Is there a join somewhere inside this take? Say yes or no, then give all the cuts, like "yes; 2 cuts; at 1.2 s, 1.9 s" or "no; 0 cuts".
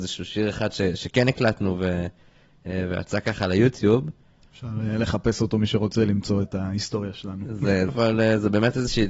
yes; 1 cut; at 7.9 s